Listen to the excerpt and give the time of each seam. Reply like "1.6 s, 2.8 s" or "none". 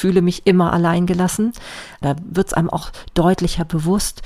2.0 s

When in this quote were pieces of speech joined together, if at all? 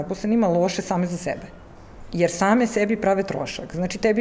none

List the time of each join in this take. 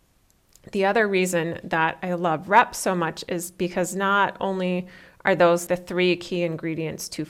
5.7 s

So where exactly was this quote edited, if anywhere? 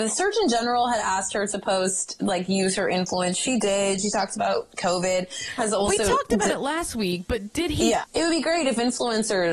5.6 s, 8.0 s

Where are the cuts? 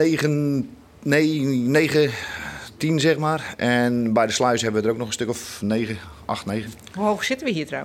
none

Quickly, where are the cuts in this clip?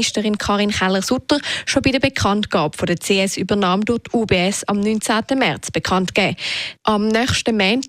6.8 s

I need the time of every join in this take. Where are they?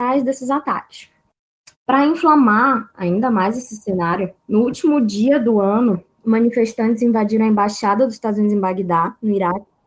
1.7 s, 4.4 s

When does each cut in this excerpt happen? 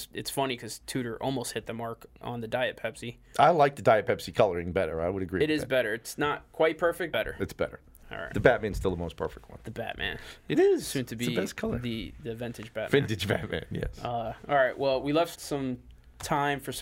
7.1 s, 15.3 s

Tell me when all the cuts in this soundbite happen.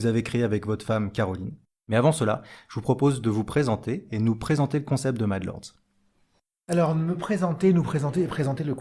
1.7 s

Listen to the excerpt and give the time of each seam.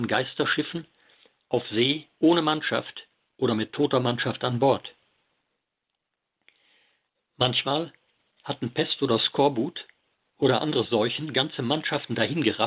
none

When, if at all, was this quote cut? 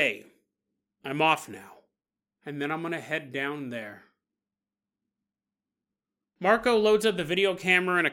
2.4 s

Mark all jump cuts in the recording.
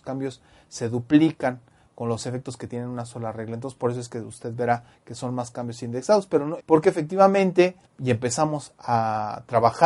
6.6 s, 7.9 s

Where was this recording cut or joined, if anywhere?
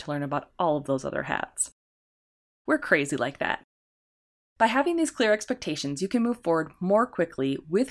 2.7 s

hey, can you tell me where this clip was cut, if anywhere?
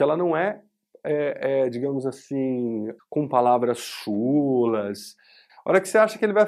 3.0 s, 5.5 s

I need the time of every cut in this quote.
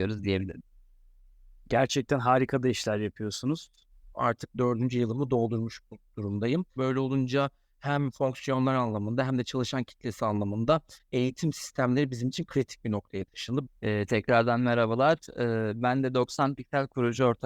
4.1 s, 6.8 s, 13.7 s

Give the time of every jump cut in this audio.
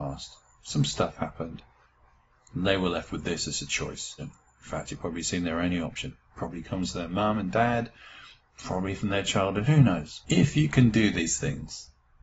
4.2 s, 10.2 s

